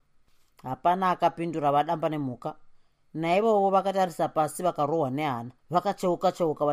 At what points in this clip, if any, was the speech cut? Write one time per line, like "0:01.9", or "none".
0:05.6